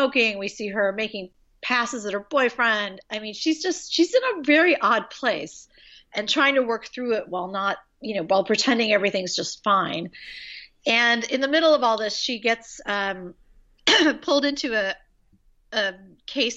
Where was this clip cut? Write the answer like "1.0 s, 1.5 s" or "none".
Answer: none